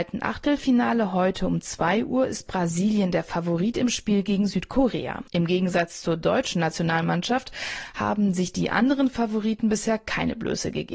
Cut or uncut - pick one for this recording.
cut